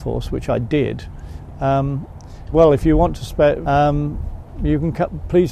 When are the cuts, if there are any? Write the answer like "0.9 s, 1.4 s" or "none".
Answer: 2.5 s, 3.6 s